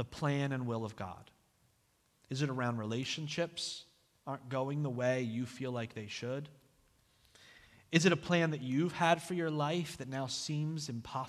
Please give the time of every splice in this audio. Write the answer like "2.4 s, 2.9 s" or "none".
none

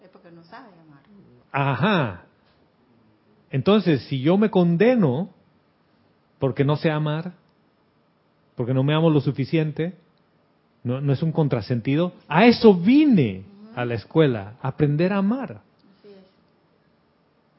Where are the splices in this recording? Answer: none

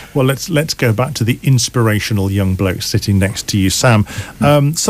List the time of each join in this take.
none

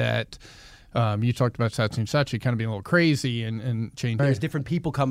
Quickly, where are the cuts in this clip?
4.2 s

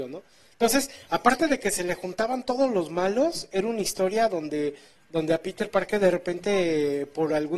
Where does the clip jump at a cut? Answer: none

